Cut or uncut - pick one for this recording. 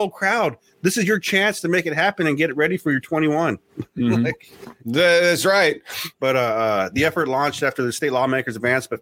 cut